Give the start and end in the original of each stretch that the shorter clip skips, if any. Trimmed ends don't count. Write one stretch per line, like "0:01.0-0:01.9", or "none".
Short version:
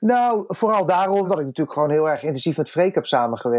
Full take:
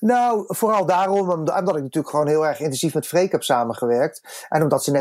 0:01.2-0:01.6